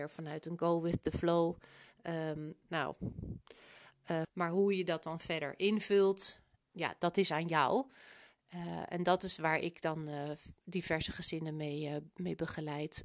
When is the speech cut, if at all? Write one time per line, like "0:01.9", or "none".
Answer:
0:02.6
0:04.2
0:06.6